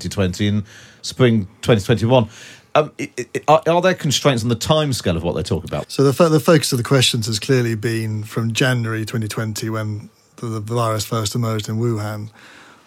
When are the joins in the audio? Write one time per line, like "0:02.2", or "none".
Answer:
0:05.8